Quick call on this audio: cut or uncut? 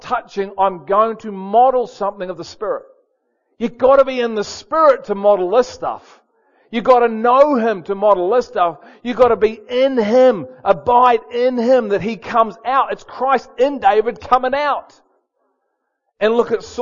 uncut